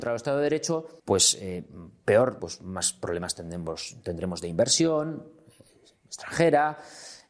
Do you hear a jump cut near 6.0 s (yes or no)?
no